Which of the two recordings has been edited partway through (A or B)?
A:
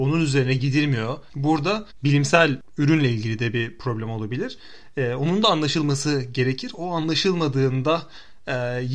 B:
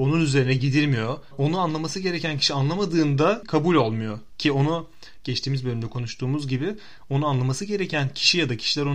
A